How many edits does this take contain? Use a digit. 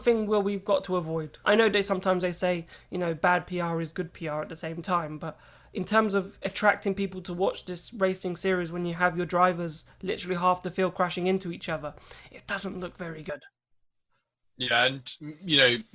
1